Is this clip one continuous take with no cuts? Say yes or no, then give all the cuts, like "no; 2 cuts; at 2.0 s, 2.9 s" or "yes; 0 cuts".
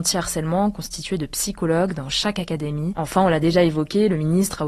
yes; 0 cuts